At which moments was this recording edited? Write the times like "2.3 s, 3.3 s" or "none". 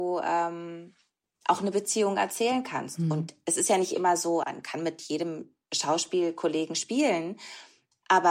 4.4 s, 5.6 s